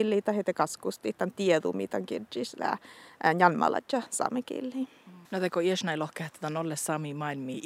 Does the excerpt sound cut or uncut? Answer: cut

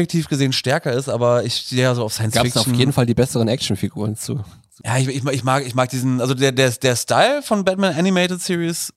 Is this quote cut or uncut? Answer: uncut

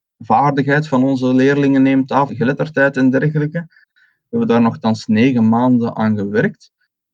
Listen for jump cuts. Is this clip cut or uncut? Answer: cut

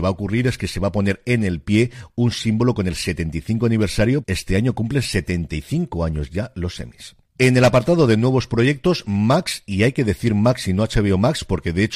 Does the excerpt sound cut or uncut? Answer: cut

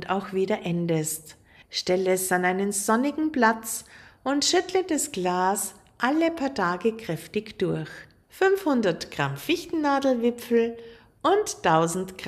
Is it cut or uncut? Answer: cut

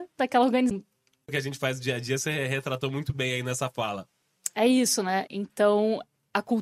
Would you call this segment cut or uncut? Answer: cut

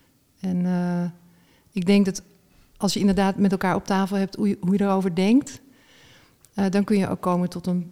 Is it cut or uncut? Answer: uncut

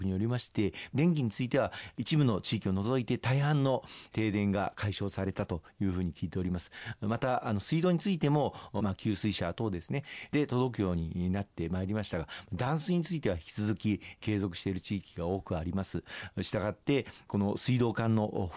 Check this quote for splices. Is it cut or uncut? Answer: cut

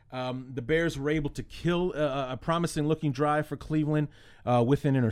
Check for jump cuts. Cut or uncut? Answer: uncut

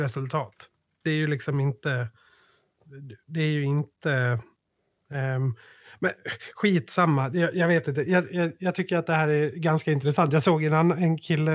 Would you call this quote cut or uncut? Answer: uncut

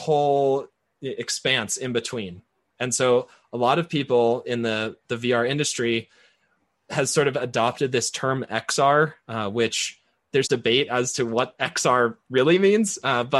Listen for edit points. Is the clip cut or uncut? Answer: cut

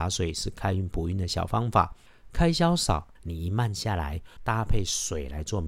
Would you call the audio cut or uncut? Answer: cut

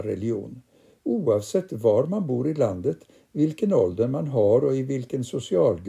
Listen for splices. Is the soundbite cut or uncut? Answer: uncut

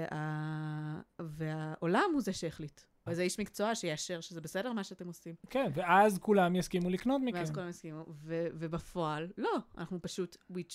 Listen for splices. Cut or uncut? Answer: cut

